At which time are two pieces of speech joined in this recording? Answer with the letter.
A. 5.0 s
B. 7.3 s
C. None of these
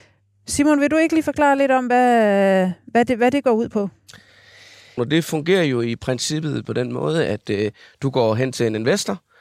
A